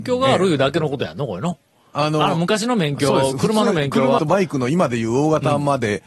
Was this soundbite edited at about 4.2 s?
yes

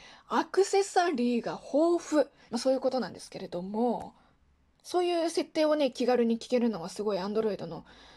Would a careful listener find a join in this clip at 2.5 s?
yes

